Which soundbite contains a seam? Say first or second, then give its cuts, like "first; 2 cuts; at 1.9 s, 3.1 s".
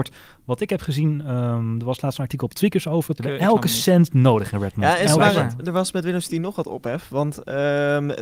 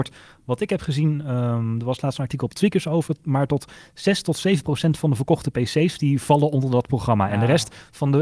first; 1 cut; at 3.2 s